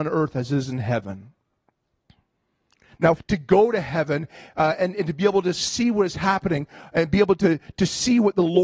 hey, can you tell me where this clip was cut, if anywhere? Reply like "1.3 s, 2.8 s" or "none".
3.2 s